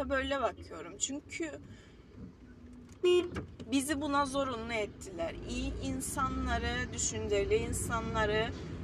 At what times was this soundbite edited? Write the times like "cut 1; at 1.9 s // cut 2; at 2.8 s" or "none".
none